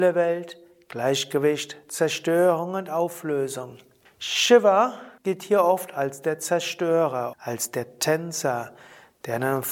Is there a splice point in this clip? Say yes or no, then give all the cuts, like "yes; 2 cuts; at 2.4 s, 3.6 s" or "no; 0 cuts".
yes; 3 cuts; at 4.1 s, 5.2 s, 7.3 s